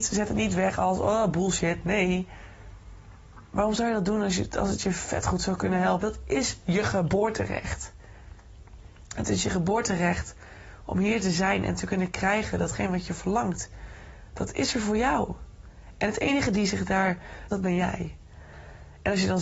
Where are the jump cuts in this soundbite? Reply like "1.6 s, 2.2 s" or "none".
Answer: 6.0 s, 17.5 s